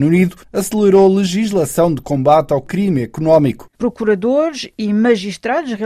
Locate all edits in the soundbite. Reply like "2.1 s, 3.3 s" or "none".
3.7 s